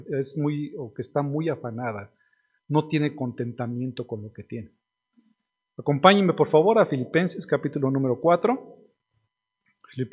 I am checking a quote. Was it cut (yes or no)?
no